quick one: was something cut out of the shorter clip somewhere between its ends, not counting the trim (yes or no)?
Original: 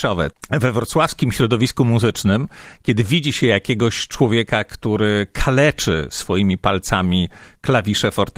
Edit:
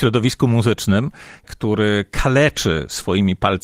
yes